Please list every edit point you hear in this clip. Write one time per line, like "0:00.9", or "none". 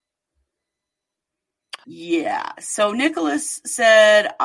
0:01.8